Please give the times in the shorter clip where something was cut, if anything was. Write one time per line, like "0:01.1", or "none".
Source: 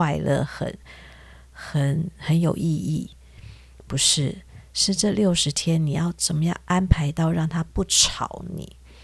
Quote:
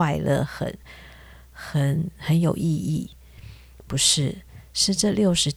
none